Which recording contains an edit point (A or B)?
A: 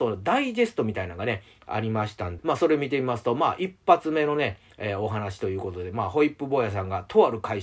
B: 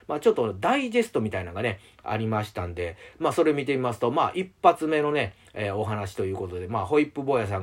A